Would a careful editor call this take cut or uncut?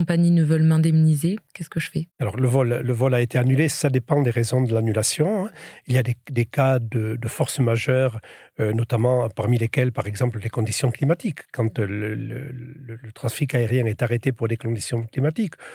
uncut